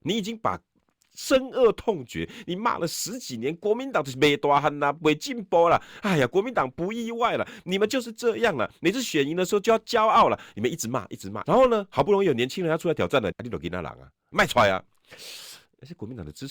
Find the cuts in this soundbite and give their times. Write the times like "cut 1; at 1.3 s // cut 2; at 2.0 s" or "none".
cut 1; at 11.4 s // cut 2; at 13.3 s